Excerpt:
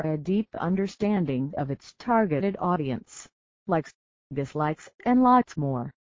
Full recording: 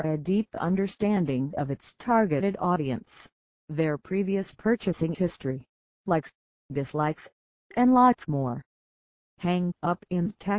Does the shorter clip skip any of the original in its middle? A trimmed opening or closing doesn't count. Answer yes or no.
yes